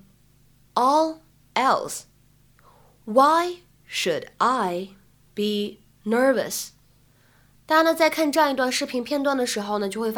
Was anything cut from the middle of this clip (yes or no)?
no